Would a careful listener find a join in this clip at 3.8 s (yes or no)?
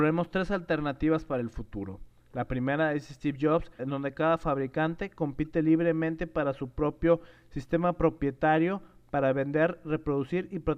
yes